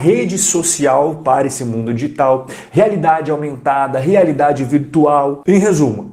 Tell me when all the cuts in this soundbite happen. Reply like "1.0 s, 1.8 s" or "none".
none